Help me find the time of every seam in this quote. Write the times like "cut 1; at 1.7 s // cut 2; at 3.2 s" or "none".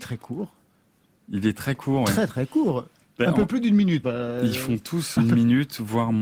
cut 1; at 4.0 s // cut 2; at 5.2 s